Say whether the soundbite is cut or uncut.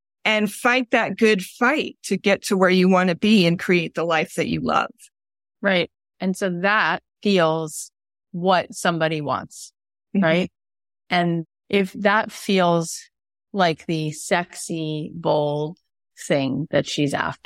cut